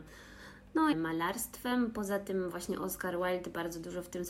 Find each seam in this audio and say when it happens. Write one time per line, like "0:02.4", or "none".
0:00.9